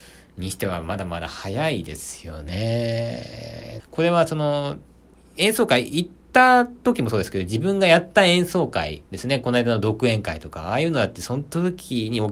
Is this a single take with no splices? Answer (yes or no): no